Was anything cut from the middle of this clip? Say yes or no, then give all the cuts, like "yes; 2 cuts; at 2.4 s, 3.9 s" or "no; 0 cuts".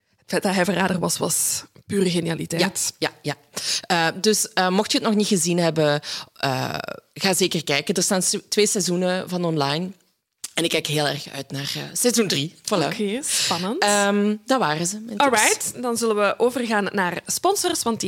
no; 0 cuts